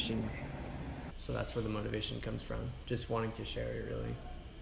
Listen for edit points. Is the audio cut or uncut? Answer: cut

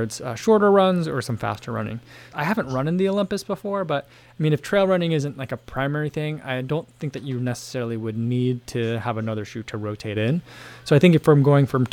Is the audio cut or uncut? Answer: cut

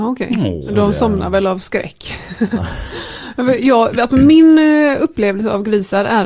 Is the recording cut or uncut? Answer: uncut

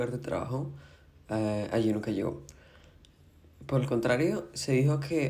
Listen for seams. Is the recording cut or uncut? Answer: uncut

